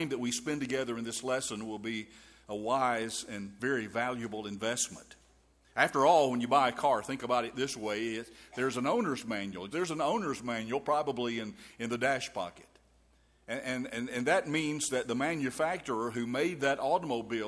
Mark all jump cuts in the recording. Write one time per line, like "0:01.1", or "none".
0:09.7